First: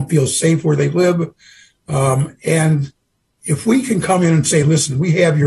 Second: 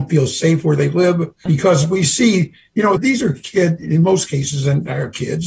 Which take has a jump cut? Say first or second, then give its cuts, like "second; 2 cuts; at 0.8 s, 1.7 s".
second; 2 cuts; at 1.5 s, 3.0 s